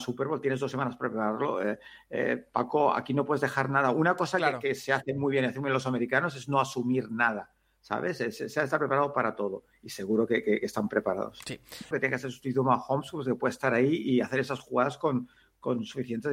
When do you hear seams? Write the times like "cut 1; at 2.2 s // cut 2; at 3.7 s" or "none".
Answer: cut 1; at 11.9 s